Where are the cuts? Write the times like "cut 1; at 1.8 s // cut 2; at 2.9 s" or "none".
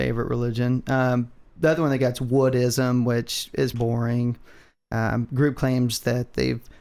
cut 1; at 3.7 s